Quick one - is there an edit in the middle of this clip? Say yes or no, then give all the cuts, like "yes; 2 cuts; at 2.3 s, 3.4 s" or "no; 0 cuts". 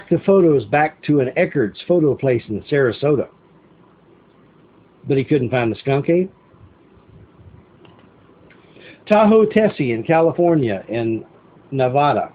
no; 0 cuts